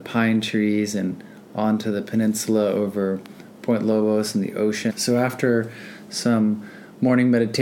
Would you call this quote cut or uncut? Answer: cut